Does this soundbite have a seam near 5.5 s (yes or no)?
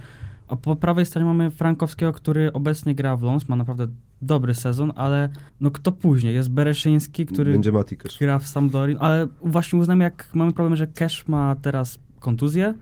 yes